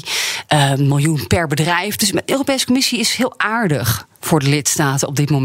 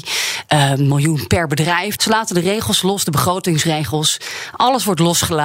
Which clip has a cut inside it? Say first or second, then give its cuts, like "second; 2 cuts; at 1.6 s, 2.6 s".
second; 1 cut; at 2.0 s